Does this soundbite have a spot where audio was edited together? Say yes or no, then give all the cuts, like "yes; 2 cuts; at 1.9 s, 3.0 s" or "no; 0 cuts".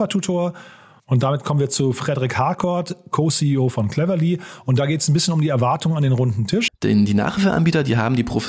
yes; 1 cut; at 6.7 s